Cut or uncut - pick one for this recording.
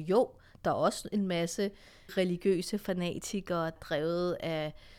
cut